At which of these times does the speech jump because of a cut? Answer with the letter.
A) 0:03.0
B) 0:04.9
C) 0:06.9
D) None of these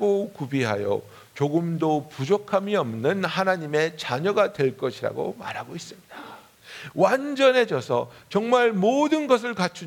C